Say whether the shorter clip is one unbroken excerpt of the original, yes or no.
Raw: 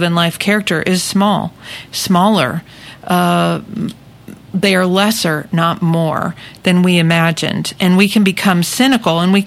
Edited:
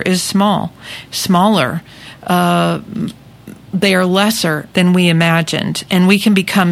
no